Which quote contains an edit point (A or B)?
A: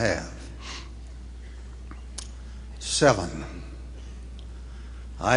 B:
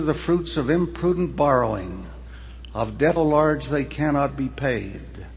B